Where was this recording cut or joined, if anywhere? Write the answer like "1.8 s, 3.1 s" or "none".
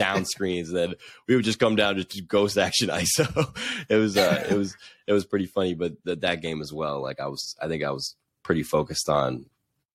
none